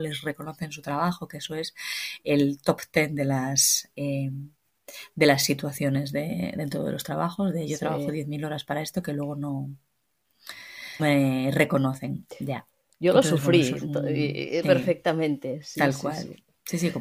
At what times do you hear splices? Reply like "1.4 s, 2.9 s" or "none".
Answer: 11.0 s, 14.6 s